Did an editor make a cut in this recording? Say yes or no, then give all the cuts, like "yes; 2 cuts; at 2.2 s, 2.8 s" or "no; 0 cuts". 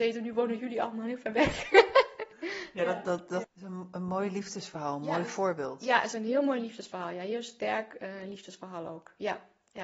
yes; 1 cut; at 3.4 s